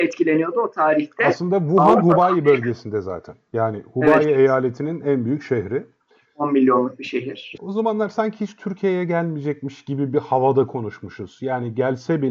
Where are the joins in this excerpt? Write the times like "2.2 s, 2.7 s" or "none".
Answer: 7.6 s